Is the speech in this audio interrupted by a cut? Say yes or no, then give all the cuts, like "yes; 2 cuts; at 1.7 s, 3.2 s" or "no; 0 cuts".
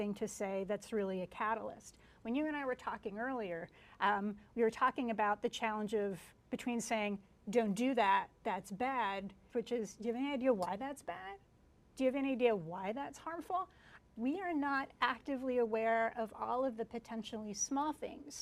yes; 2 cuts; at 9.5 s, 14.0 s